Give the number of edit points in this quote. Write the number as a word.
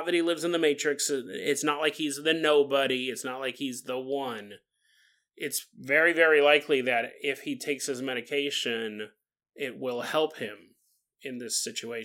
zero